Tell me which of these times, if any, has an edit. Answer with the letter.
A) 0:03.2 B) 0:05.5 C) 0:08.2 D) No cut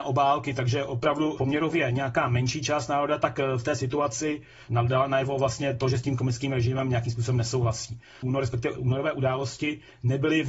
C